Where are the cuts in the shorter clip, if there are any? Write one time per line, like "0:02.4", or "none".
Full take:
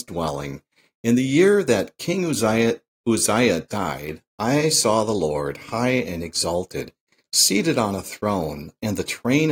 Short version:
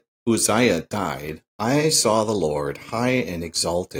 none